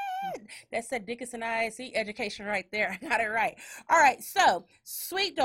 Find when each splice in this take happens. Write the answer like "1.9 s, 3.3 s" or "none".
none